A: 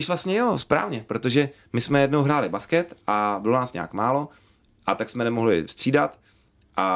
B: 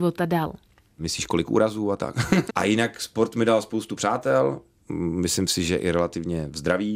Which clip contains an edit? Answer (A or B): B